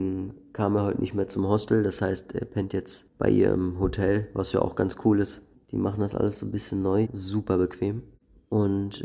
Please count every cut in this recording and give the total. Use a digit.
2